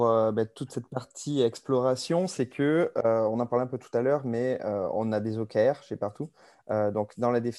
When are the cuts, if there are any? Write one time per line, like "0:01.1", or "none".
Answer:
none